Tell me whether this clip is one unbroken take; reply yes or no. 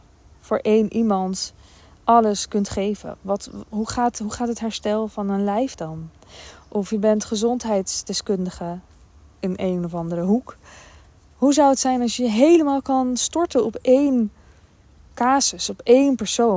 yes